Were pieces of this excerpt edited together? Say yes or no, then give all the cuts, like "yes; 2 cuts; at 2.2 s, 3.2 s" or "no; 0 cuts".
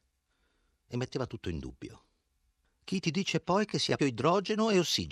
yes; 1 cut; at 4.0 s